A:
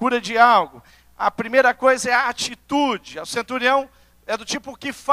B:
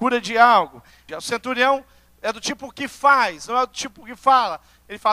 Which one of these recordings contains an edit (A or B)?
B